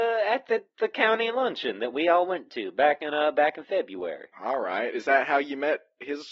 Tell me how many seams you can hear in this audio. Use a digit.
1